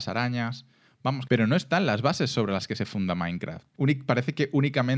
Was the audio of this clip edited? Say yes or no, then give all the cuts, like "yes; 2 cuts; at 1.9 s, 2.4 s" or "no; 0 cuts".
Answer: yes; 2 cuts; at 1.3 s, 3.7 s